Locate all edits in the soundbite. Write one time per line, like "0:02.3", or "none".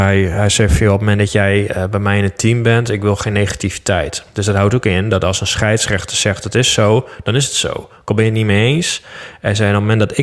none